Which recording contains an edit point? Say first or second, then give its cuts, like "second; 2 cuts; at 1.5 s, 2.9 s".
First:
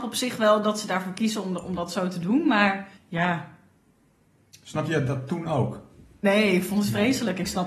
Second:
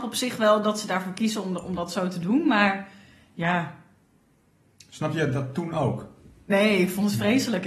first; 1 cut; at 3.0 s